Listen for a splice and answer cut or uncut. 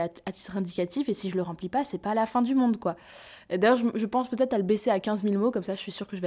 uncut